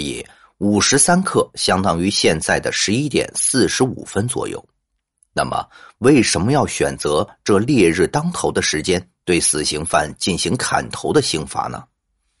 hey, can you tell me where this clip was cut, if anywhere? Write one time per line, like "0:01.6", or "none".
none